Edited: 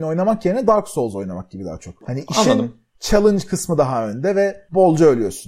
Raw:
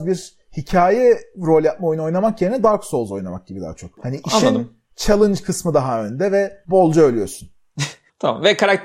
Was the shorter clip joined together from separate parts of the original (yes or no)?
no